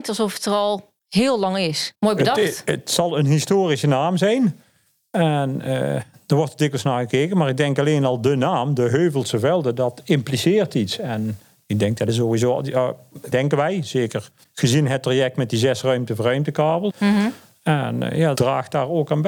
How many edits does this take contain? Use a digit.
3